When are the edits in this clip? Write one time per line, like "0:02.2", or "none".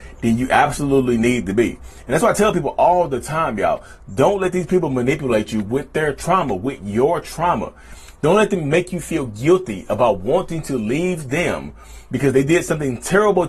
none